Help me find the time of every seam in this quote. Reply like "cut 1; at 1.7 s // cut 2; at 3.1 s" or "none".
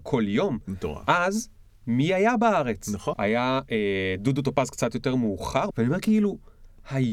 cut 1; at 3.1 s // cut 2; at 5.7 s